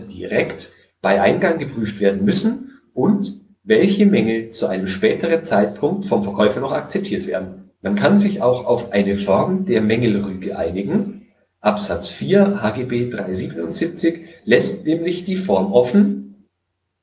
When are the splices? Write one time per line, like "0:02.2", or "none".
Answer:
0:07.8